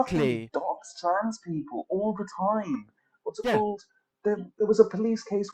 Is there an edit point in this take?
no; 0 cuts

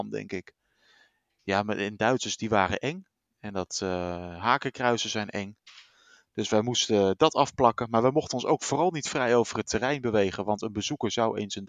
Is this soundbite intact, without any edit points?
yes; 0 cuts

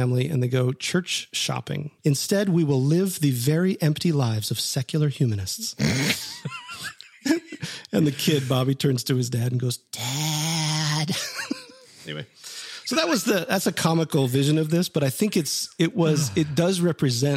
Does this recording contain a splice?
yes; 1 cut; at 2.0 s

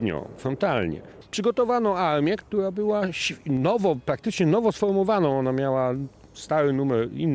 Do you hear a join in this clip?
yes; 2 cuts; at 1.2 s, 2.4 s

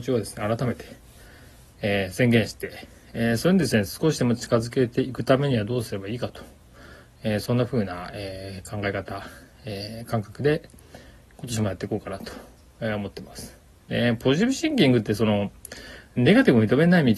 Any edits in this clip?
yes; 1 cut; at 13.8 s

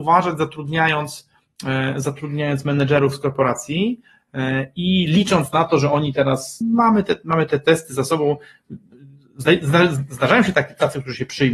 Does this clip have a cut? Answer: yes; 1 cut; at 6.6 s

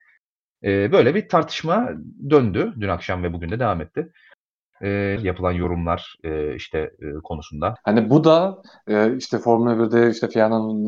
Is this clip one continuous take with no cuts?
no; 2 cuts; at 5.2 s, 7.8 s

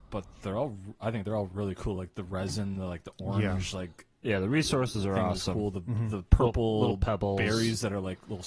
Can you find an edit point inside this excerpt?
no; 0 cuts

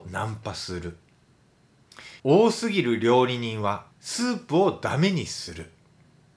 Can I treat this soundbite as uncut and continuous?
no; 2 cuts; at 2.2 s, 3.9 s

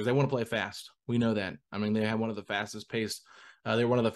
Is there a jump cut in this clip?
no; 0 cuts

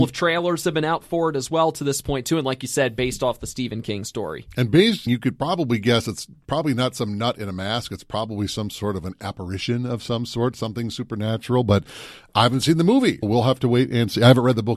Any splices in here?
yes; 2 cuts; at 5.1 s, 13.2 s

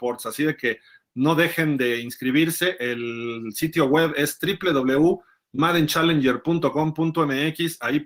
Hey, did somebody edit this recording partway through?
no; 0 cuts

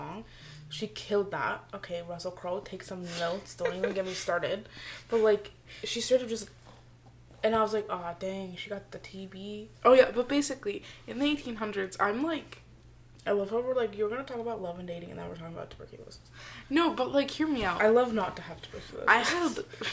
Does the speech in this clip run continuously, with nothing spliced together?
yes; 0 cuts

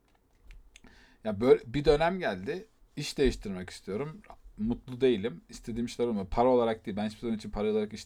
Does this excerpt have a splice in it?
no; 0 cuts

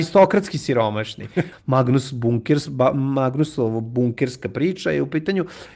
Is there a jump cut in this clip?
yes; 1 cut; at 1.5 s

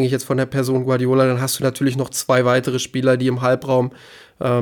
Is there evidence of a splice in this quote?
no; 0 cuts

